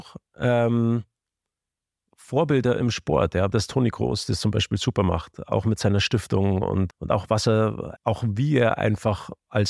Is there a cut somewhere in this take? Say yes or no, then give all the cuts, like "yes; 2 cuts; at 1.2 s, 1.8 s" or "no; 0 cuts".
yes; 3 cuts; at 3.5 s, 6.9 s, 8.0 s